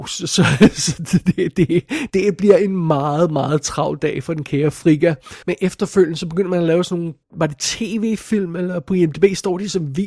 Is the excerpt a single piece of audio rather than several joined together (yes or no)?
no